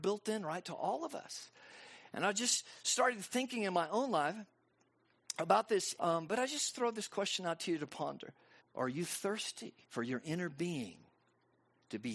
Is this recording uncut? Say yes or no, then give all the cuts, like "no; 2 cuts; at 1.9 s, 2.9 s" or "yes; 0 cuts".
no; 3 cuts; at 6.0 s, 8.6 s, 9.8 s